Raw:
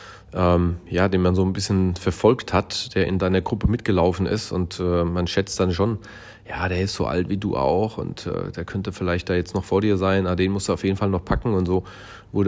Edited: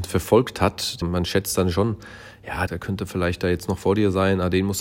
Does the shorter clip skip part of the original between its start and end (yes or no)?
yes